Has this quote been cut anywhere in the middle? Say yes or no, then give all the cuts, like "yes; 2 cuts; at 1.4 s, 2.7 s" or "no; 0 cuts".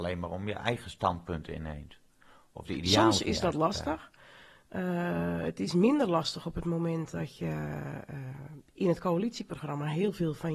no; 0 cuts